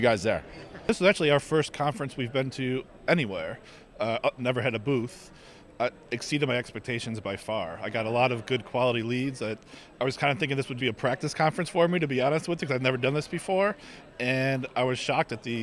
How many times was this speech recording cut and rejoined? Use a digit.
2